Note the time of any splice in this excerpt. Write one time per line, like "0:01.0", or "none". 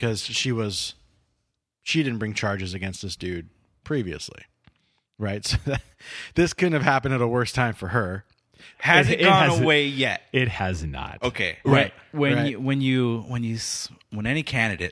0:08.7
0:11.6

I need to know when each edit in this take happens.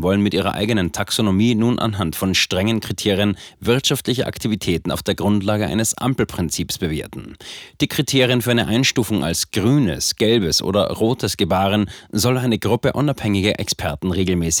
none

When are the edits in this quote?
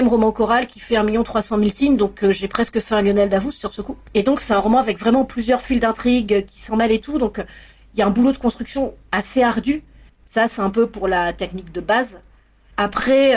0:10.1

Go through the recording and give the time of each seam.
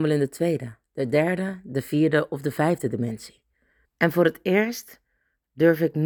0:03.8

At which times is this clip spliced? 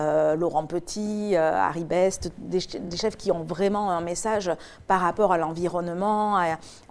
none

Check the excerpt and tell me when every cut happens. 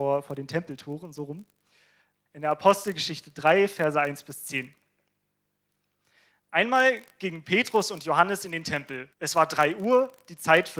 0:02.3
0:09.1

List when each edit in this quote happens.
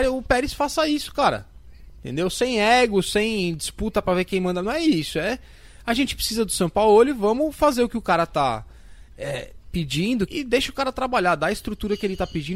0:10.3

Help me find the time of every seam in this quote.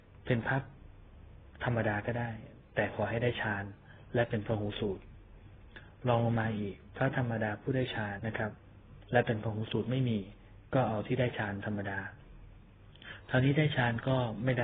0:08.2

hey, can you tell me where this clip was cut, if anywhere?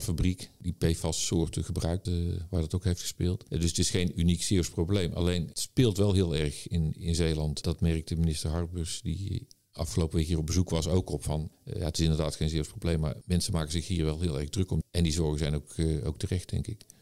0:02.1
0:14.8

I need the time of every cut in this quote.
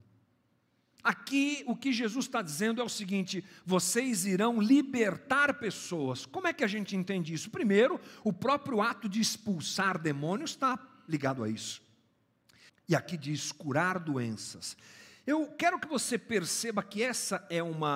0:12.7

